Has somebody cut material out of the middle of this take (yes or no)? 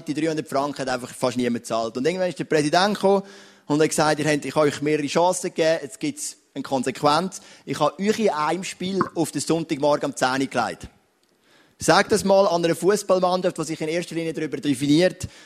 no